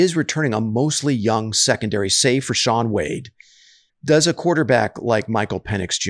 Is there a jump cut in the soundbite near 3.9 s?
yes; 1 cut; at 3.9 s

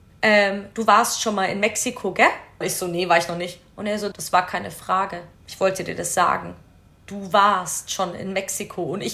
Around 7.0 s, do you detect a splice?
no; 3 cuts; at 2.6 s, 4.1 s, 5.3 s

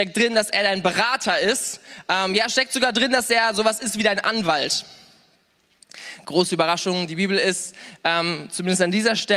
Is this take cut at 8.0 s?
no; 1 cut; at 6.2 s

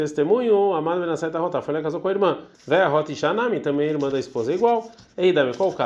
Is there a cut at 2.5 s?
yes; 1 cut; at 2.5 s

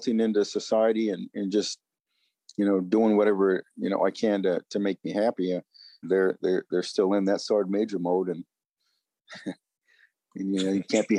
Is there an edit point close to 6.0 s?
yes; 1 cut; at 6.0 s

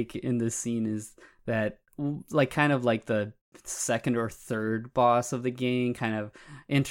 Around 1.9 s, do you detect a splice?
yes; 1 cut; at 1.9 s

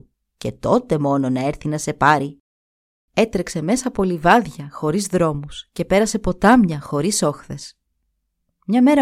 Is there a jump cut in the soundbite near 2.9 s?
yes; 1 cut; at 2.9 s

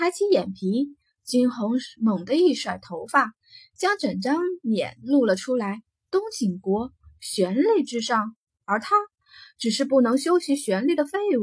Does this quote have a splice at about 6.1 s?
yes; 1 cut; at 6.1 s

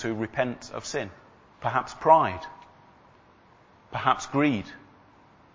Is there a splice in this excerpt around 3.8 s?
no; 1 cut; at 1.5 s

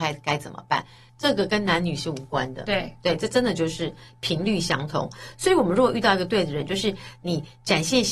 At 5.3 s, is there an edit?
no; 1 cut; at 1.1 s

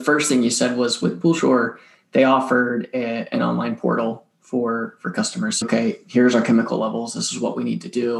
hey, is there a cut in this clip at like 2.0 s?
no; 1 cut; at 5.6 s

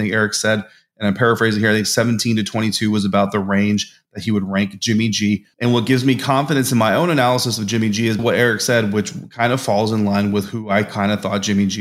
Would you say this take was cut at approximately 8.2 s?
yes; 2 cuts; at 5.5 s, 8.2 s

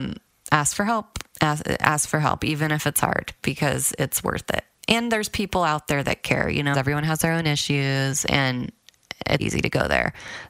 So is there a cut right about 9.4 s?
yes; 2 cuts; at 6.7 s, 9.4 s

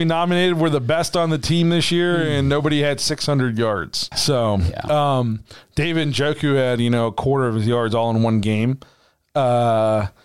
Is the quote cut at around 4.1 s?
yes; 1 cut; at 4.1 s

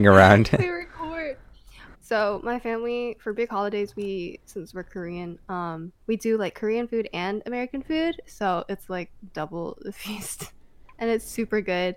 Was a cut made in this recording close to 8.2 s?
no; 2 cuts; at 1.9 s, 6.0 s

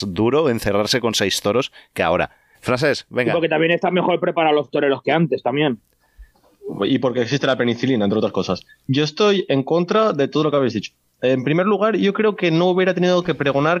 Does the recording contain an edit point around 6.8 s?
no; 1 cut; at 2.5 s

